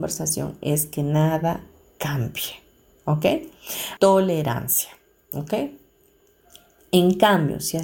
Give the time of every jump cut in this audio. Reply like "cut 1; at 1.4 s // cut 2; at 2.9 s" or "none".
cut 1; at 4.0 s